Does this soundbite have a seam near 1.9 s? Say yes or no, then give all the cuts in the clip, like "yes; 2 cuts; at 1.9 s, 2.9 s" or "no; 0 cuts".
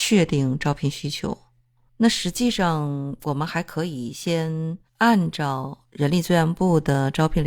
yes; 2 cuts; at 1.9 s, 4.9 s